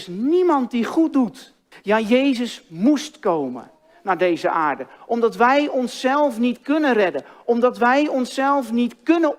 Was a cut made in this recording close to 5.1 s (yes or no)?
no